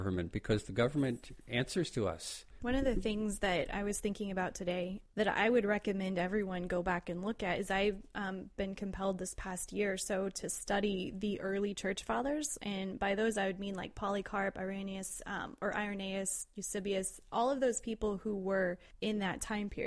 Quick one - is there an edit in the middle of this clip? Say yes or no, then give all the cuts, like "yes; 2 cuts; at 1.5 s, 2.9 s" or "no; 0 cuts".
yes; 1 cut; at 2.6 s